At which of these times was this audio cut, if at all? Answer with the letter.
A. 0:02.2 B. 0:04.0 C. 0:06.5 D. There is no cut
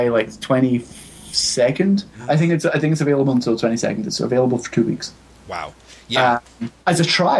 D